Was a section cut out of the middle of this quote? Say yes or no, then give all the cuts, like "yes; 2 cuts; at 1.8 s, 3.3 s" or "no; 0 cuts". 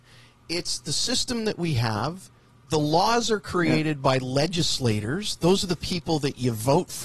no; 0 cuts